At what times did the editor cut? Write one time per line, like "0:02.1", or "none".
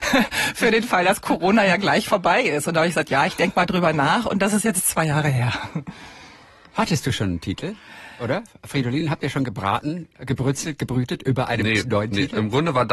none